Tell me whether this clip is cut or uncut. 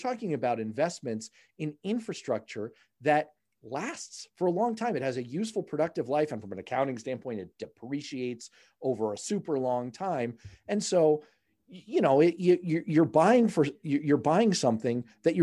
uncut